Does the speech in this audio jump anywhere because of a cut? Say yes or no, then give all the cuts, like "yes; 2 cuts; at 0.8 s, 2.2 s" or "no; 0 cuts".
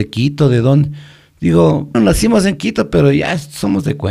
yes; 1 cut; at 1.9 s